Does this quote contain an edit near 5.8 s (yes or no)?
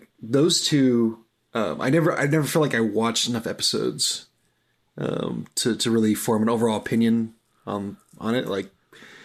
no